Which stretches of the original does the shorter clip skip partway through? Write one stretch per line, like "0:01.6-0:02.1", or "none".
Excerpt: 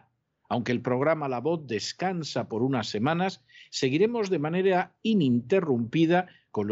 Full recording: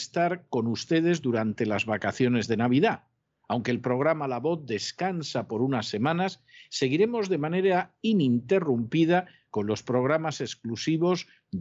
none